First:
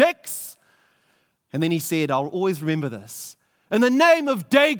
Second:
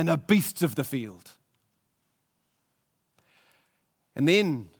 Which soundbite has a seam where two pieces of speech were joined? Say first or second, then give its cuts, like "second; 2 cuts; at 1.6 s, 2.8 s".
first; 1 cut; at 1.4 s